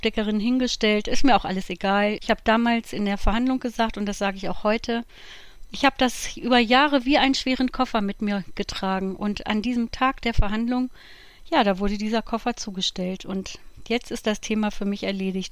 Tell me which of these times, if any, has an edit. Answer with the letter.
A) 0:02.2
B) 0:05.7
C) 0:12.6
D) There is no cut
A